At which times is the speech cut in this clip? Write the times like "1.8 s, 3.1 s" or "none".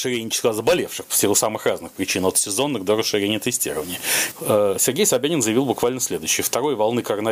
4.3 s